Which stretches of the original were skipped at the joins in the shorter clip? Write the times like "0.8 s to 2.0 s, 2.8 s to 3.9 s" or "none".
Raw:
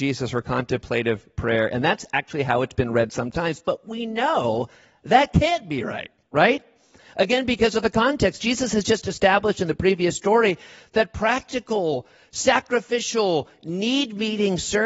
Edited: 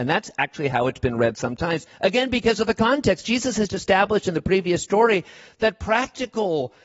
3.6 s to 7.0 s, 8.8 s to 9.0 s